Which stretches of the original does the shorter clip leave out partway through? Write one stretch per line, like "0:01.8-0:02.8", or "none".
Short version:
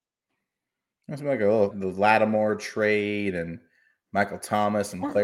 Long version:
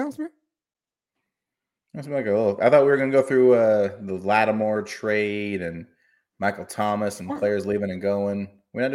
0:02.6-0:04.0